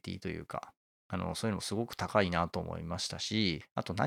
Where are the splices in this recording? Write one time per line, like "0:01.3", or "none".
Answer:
none